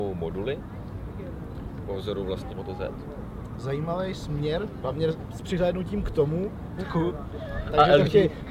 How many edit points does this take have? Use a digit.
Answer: 3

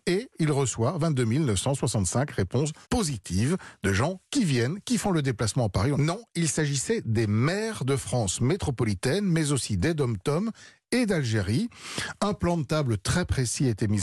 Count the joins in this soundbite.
2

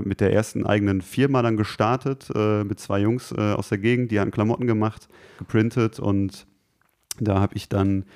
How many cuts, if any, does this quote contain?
1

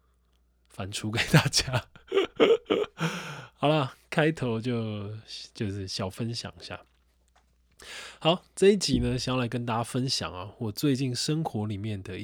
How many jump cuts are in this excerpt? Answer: 0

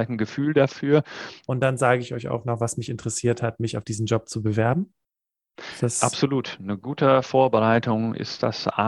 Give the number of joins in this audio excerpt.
1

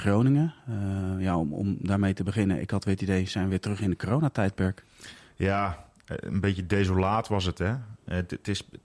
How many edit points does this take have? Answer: 0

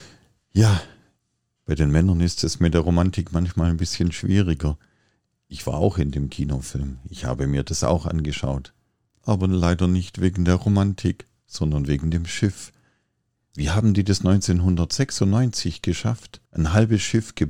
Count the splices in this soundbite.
1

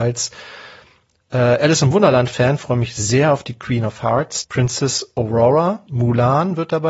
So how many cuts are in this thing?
2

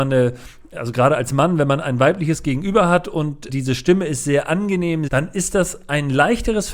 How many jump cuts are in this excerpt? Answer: 2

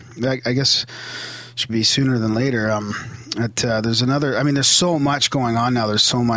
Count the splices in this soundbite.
1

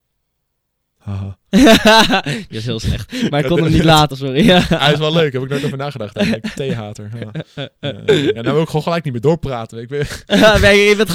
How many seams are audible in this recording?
2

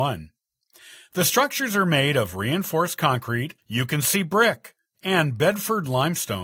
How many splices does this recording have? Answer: 2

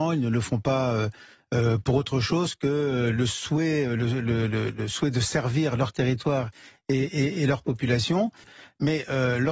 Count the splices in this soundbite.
1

